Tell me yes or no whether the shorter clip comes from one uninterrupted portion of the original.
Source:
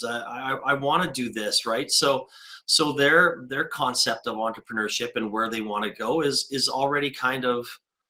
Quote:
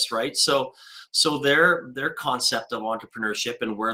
yes